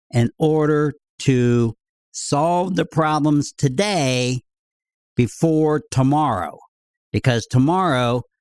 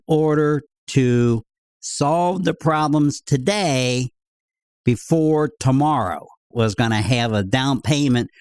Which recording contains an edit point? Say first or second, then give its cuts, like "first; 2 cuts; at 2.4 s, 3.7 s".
second; 1 cut; at 6.5 s